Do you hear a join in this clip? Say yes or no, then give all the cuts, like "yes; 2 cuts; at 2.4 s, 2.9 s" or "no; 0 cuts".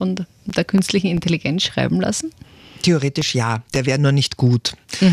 no; 0 cuts